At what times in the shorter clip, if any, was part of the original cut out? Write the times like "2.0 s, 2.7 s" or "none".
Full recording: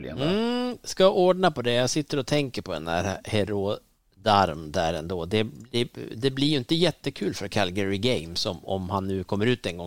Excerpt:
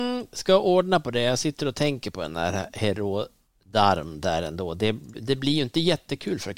5.1 s